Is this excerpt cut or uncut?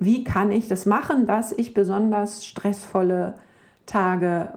uncut